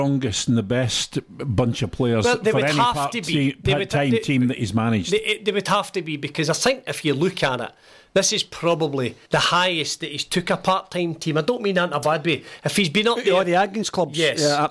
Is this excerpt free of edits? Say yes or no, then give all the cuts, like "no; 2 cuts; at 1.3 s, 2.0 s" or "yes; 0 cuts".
no; 1 cut; at 9.2 s